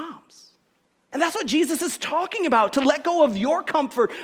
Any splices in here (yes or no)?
yes